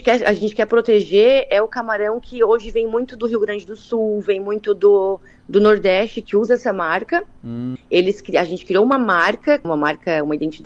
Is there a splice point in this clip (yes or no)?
yes